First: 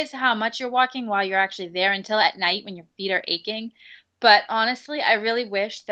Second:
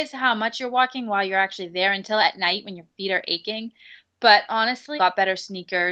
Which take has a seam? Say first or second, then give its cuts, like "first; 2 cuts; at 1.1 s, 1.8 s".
second; 1 cut; at 5.0 s